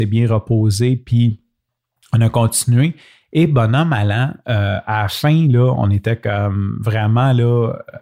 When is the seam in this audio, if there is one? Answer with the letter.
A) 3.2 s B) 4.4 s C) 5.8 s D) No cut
D